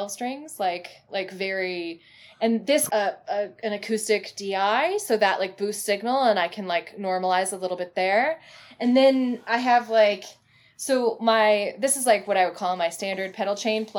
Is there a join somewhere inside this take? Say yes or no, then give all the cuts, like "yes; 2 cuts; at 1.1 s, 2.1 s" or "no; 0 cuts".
yes; 1 cut; at 2.9 s